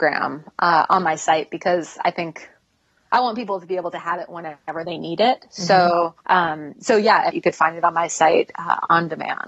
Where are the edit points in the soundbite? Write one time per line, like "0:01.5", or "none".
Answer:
0:06.2
0:07.3